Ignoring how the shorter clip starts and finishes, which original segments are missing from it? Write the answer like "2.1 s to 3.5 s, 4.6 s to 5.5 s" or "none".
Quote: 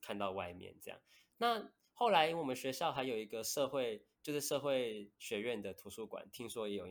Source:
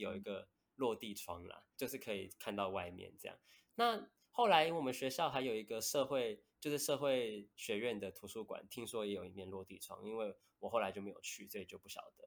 none